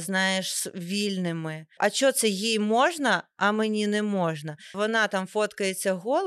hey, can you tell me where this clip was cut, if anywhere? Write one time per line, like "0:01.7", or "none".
0:01.8
0:04.7

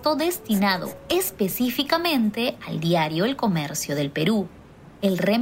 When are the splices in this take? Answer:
none

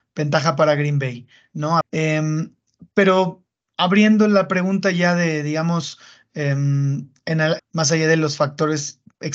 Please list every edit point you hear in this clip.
0:01.8
0:07.6

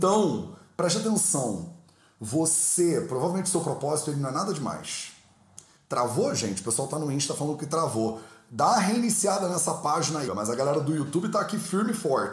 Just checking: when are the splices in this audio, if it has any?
0:05.8
0:10.3

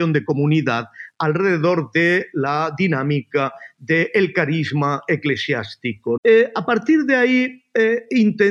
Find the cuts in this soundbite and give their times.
0:06.2

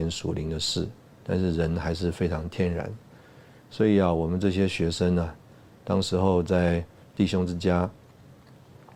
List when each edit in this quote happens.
none

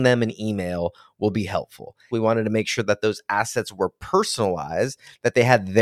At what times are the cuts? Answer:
0:02.1

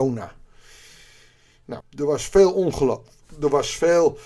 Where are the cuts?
0:01.8

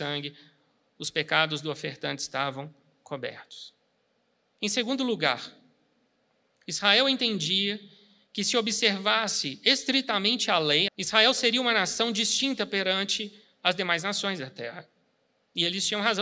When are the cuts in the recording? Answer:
0:04.5
0:10.9

